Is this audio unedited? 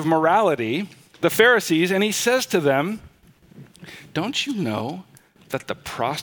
yes; 0 cuts

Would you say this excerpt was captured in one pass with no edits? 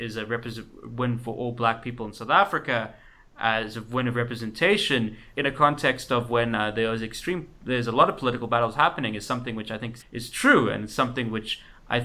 no; 2 cuts; at 5.3 s, 10.0 s

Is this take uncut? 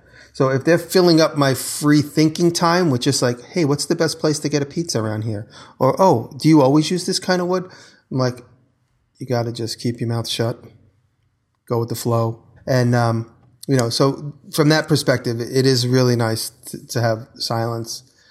no; 1 cut; at 12.6 s

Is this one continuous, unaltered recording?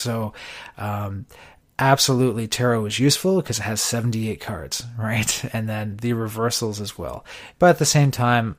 no; 1 cut; at 7.5 s

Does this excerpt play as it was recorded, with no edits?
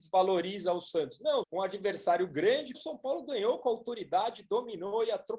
no; 2 cuts; at 1.4 s, 2.7 s

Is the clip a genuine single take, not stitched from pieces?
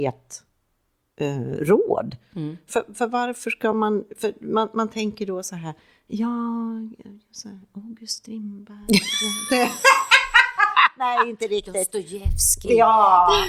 yes; 0 cuts

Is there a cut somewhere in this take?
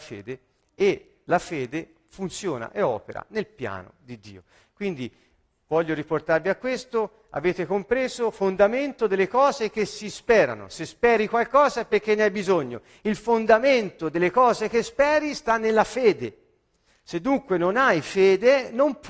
no; 0 cuts

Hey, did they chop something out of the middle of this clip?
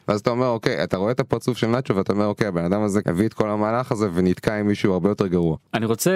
no; 0 cuts

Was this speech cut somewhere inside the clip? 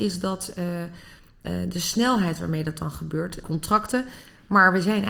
yes; 1 cut; at 3.4 s

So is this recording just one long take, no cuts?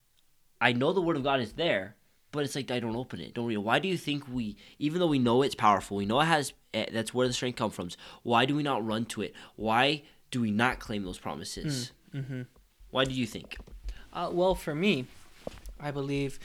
yes; 0 cuts

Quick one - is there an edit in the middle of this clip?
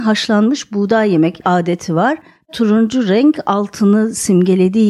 yes; 1 cut; at 2.4 s

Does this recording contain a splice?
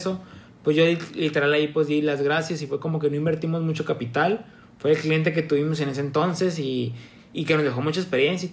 no; 0 cuts

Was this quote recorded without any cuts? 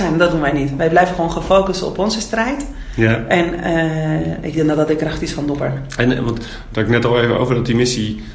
yes; 0 cuts

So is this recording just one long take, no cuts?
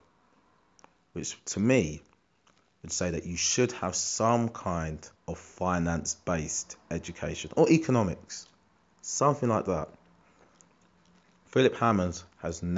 no; 1 cut; at 5.2 s

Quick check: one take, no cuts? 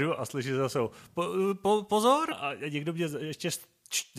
no; 1 cut; at 2.3 s

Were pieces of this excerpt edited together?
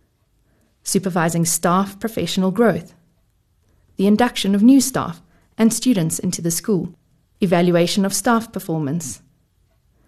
yes; 1 cut; at 7.2 s

